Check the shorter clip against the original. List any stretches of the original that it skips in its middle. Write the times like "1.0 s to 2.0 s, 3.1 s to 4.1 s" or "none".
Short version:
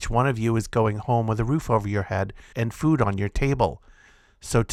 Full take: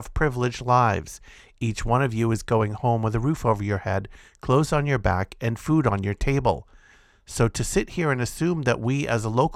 4.3 s to 5.4 s